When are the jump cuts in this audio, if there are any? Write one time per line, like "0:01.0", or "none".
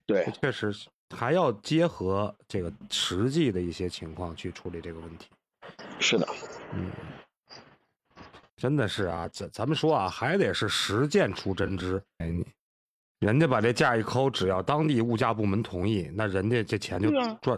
0:12.2